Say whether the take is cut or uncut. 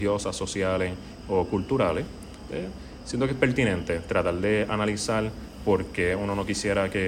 cut